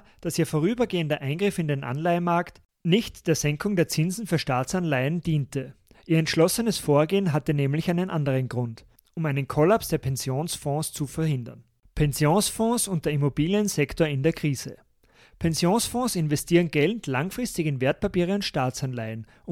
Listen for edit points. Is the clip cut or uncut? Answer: uncut